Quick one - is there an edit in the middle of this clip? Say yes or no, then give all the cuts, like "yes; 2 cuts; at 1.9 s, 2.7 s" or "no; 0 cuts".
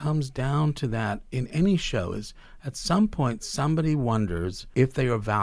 no; 0 cuts